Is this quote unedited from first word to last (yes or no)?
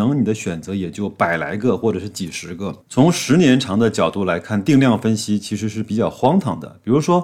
no